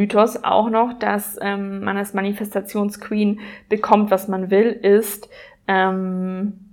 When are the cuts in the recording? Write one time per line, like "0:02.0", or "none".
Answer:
none